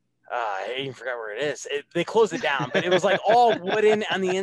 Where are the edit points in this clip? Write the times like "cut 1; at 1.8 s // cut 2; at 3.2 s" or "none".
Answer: none